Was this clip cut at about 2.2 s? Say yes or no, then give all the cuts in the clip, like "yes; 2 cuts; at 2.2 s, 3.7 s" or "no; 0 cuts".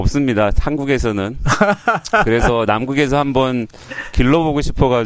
no; 0 cuts